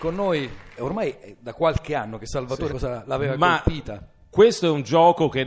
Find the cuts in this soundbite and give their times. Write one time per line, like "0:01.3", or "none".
0:02.7